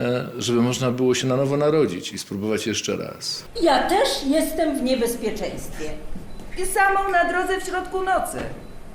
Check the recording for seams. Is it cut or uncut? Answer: cut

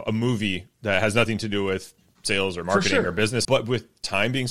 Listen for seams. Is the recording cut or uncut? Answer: cut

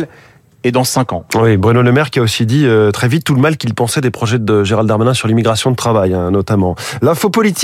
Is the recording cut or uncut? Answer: uncut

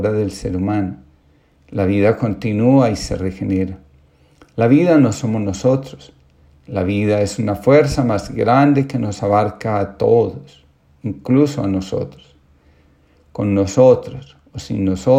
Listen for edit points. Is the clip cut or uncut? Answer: uncut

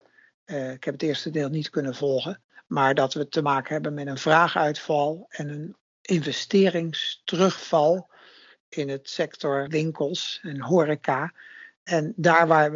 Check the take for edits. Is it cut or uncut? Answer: cut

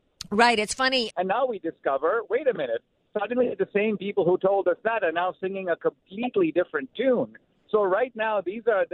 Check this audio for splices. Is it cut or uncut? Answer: cut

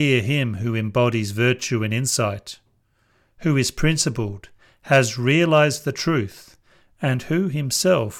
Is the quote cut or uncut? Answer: uncut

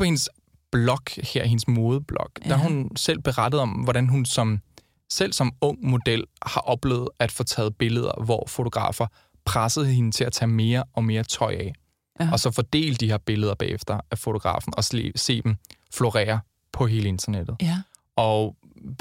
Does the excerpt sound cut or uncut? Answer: uncut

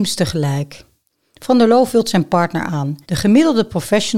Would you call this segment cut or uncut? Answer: cut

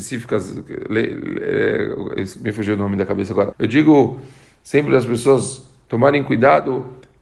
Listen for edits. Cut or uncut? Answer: cut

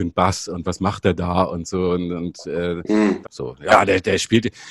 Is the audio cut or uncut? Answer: cut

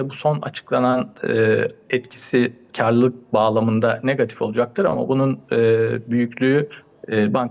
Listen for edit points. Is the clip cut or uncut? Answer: cut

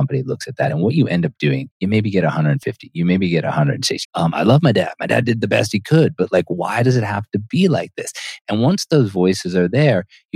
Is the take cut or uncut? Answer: cut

